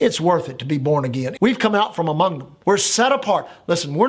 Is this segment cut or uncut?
cut